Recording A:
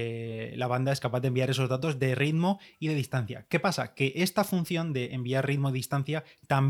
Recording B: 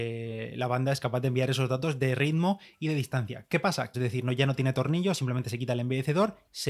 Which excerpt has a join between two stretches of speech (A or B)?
B